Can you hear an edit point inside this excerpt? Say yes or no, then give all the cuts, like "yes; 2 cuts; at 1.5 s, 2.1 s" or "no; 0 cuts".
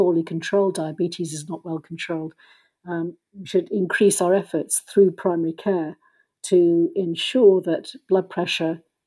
no; 0 cuts